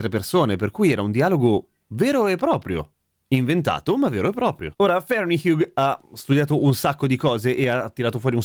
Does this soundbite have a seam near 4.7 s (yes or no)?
no